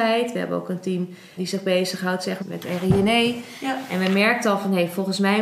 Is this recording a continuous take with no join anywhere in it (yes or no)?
no